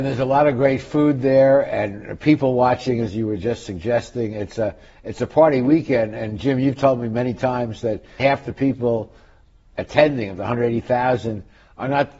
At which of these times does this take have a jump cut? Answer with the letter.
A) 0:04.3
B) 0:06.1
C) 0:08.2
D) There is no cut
C